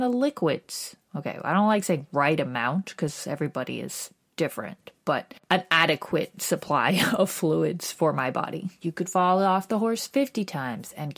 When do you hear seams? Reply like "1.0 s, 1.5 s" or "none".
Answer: 8.8 s